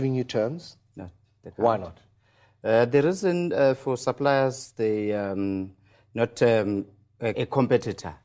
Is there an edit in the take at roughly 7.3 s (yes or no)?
yes